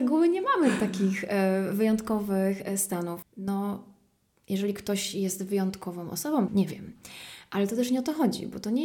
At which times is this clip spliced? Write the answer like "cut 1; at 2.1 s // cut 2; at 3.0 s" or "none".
cut 1; at 3.2 s // cut 2; at 6.5 s